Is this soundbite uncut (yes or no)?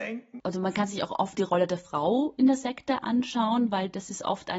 no